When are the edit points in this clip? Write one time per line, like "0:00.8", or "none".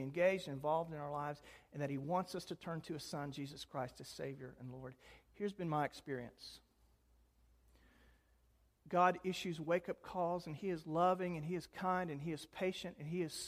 0:05.3